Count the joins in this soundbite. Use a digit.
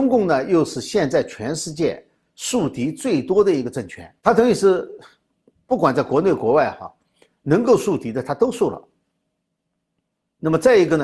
1